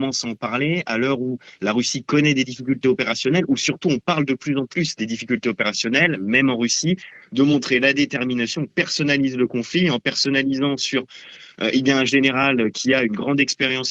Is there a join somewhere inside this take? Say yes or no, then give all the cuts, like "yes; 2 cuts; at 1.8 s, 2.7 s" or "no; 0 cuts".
no; 0 cuts